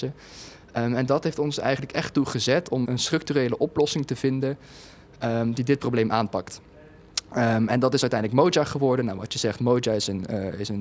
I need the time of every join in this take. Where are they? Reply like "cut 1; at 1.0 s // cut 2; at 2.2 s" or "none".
cut 1; at 2.8 s